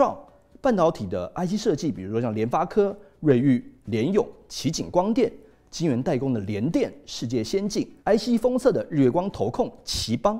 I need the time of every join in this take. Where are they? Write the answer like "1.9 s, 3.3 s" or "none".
8.0 s